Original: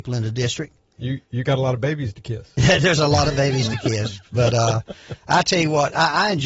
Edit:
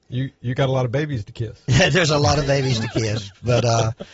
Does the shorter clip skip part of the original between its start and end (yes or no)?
no